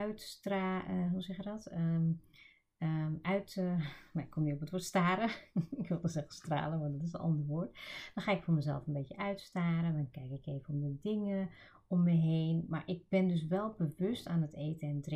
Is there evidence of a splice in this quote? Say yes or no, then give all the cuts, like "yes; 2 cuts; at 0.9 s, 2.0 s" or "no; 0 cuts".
no; 0 cuts